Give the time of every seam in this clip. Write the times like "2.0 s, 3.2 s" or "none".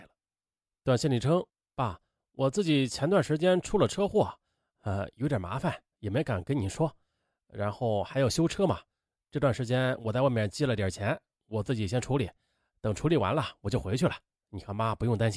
none

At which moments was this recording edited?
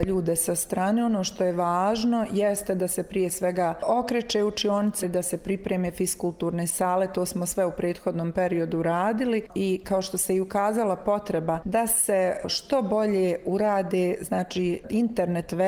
5.0 s

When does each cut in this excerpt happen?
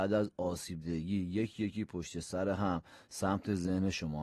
none

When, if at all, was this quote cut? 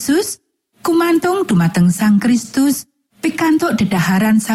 3.1 s

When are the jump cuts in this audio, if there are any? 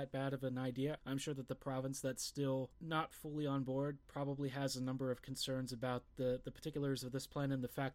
1.0 s

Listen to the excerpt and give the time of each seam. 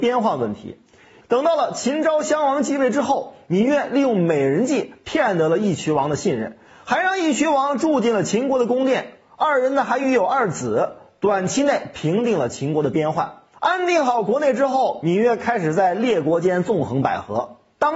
1.2 s, 13.5 s

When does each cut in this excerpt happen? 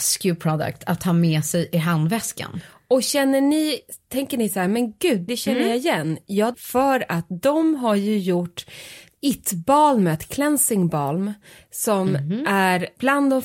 5.3 s, 6.5 s

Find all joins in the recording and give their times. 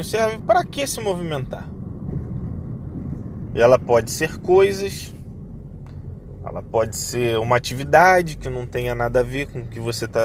3.5 s

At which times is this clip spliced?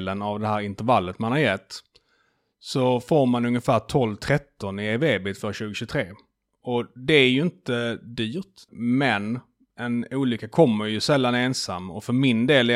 8.7 s

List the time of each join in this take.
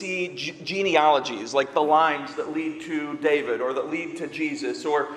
none

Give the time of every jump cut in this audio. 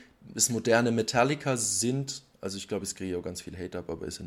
none

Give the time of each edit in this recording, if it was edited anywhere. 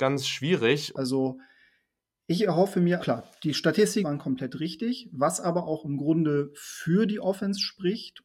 0.9 s, 3.0 s, 4.0 s

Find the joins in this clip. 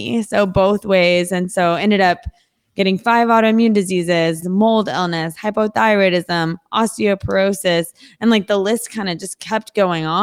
4.4 s

